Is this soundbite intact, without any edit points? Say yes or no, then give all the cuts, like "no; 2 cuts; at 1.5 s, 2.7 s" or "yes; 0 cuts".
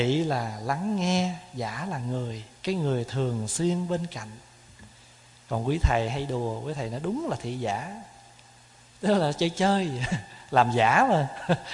no; 1 cut; at 2.5 s